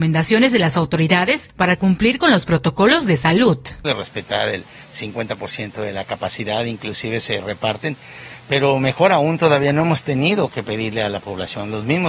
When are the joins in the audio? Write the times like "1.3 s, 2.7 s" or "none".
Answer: 3.8 s